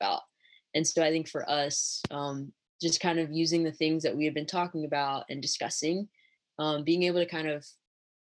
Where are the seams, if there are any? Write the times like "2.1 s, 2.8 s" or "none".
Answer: none